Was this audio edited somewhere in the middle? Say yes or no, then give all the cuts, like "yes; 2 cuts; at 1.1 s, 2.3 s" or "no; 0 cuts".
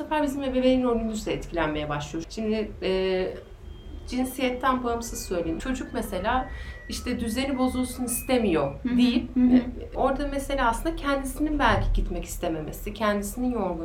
yes; 3 cuts; at 2.2 s, 5.6 s, 9.3 s